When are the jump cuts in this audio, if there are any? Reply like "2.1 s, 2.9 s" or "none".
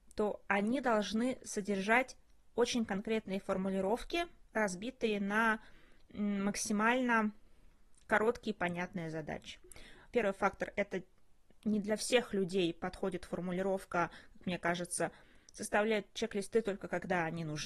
10.1 s

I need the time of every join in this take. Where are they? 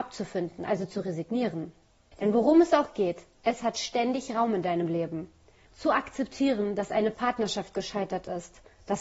2.1 s, 5.7 s

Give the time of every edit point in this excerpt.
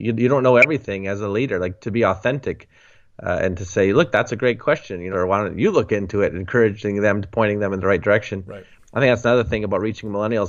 5.1 s

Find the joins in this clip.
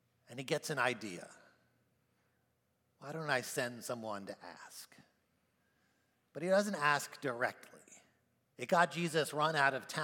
8.4 s

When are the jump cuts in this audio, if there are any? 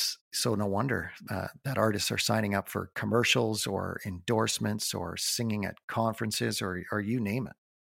none

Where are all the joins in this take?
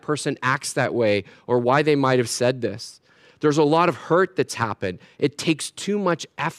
none

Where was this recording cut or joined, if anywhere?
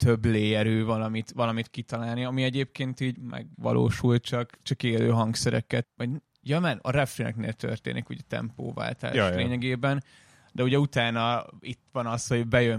5.8 s

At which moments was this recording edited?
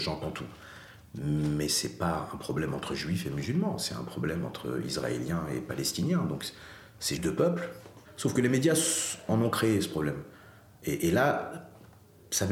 7.2 s

